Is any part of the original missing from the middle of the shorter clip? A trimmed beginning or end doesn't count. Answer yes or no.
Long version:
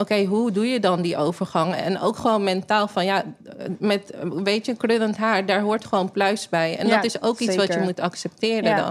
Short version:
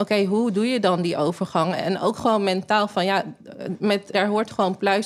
yes